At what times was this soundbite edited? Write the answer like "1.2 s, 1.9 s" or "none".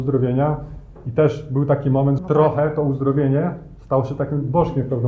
2.2 s